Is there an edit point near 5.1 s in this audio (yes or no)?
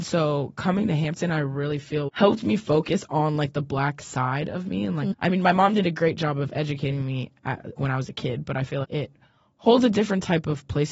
yes